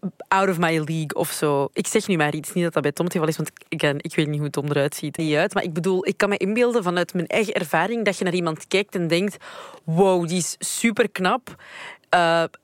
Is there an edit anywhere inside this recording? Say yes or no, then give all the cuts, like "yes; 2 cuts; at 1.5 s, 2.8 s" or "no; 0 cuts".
yes; 1 cut; at 5.2 s